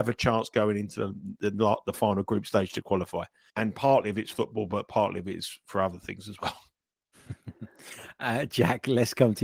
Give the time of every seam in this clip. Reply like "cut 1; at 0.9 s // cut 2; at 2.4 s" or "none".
cut 1; at 3.5 s